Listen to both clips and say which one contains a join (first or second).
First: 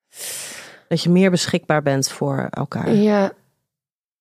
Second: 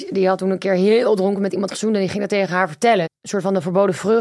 second